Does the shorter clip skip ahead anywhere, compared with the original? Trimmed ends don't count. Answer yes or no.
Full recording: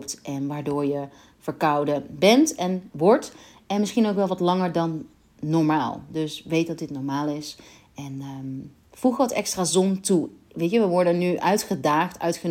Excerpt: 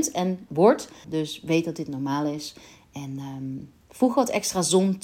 yes